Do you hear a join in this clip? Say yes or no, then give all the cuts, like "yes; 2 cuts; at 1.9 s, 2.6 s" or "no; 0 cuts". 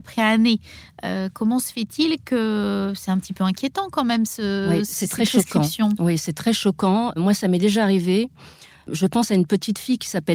no; 0 cuts